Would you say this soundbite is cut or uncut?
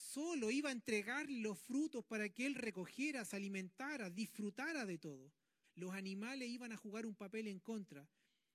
cut